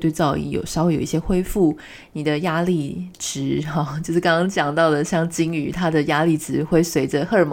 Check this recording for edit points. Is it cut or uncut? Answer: uncut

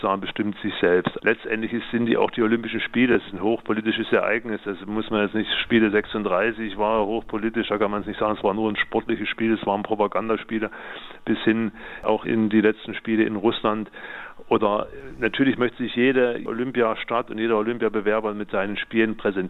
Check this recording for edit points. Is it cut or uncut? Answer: cut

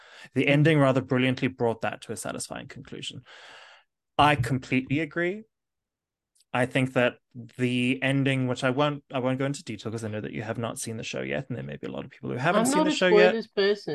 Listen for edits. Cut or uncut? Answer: uncut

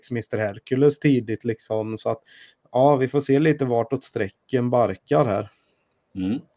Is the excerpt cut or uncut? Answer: uncut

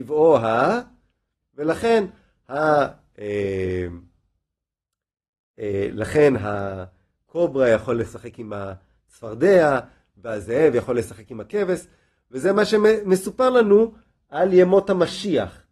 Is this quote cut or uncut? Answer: cut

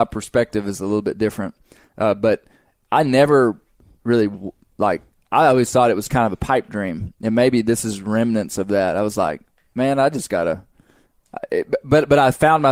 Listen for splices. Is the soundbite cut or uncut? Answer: uncut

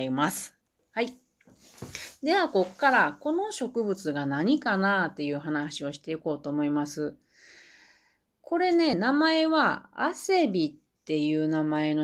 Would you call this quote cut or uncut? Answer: uncut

